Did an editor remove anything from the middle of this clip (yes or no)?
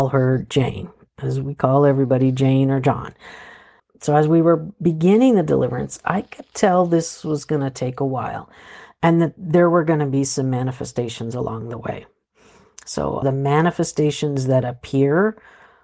yes